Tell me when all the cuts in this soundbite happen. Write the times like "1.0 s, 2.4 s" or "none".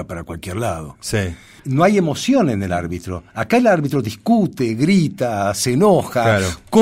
1.6 s